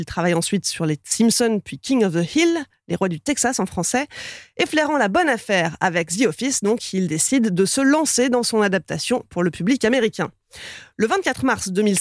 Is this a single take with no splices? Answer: yes; 0 cuts

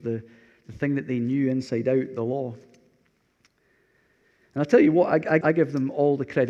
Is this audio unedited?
no; 1 cut; at 5.4 s

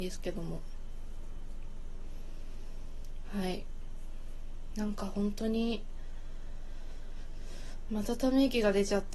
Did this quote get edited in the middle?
yes; 1 cut; at 7.9 s

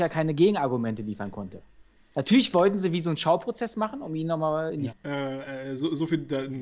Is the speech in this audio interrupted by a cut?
yes; 1 cut; at 4.9 s

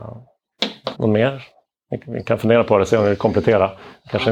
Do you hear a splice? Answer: yes; 1 cut; at 0.9 s

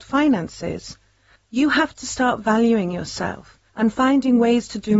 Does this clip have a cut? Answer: yes; 2 cuts; at 1.4 s, 3.7 s

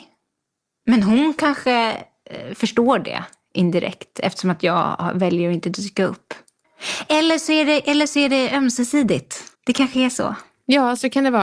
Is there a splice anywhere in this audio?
yes; 1 cut; at 9.5 s

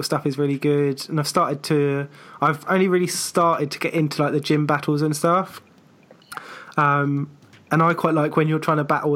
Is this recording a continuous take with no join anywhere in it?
yes; 0 cuts

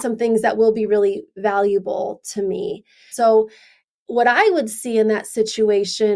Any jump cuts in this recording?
yes; 1 cut; at 3.1 s

